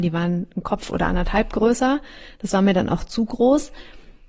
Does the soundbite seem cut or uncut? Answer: uncut